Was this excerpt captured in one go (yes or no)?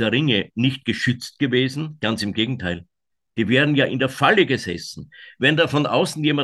yes